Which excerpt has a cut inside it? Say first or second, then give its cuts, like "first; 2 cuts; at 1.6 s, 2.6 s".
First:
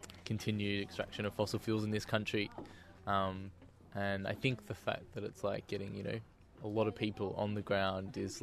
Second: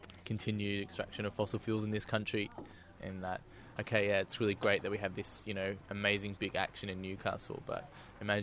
second; 1 cut; at 3.0 s